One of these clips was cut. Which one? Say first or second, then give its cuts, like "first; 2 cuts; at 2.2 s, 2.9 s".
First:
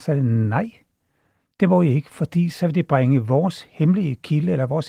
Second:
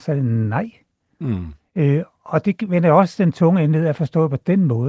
second; 1 cut; at 1.1 s